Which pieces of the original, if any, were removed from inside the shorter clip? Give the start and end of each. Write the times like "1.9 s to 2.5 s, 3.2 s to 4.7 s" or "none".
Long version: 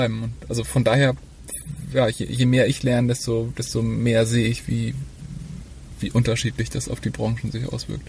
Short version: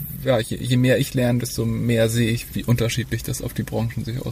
3.1 s to 3.5 s, 4.7 s to 6.0 s